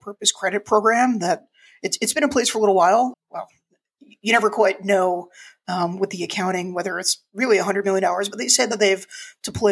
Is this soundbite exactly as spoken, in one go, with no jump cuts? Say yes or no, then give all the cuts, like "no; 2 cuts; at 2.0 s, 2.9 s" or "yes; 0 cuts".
no; 1 cut; at 3.1 s